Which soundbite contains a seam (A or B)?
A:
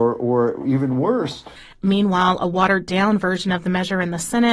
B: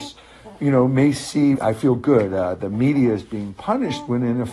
B